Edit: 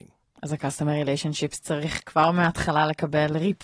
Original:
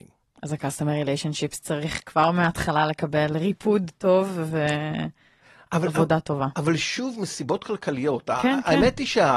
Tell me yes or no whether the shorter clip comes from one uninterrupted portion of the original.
yes